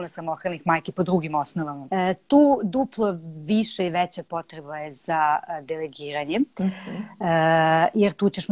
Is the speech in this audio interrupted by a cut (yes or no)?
yes